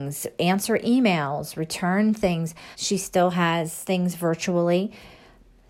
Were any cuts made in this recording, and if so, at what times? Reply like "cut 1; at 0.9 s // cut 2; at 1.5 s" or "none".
cut 1; at 2.7 s